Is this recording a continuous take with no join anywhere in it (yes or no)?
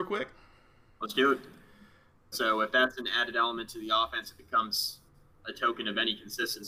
no